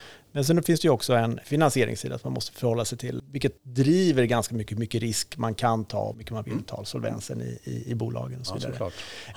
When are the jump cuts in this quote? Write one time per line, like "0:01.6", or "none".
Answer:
0:06.1